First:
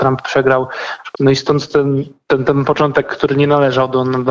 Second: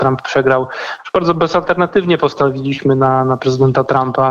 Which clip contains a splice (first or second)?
first